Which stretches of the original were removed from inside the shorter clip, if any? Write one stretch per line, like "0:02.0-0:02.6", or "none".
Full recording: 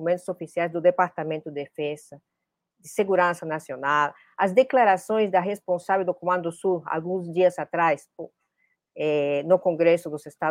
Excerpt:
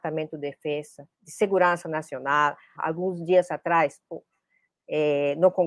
0:02.3-0:02.7
0:04.3-0:06.8